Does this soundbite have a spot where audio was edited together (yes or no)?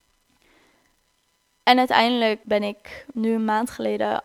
yes